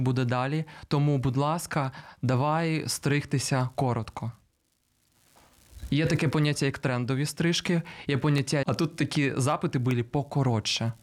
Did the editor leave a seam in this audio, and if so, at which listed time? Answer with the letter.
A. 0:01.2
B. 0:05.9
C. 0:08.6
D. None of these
C